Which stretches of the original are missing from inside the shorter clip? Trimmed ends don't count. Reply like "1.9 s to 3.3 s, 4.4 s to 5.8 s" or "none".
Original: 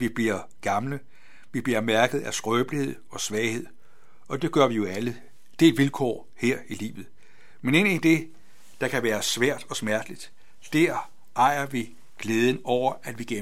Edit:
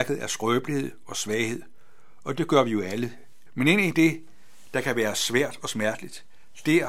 5.5 s to 7.5 s